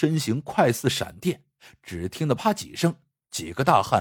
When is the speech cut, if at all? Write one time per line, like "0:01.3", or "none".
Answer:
0:02.4